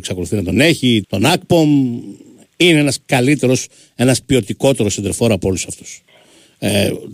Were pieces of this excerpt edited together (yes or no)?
yes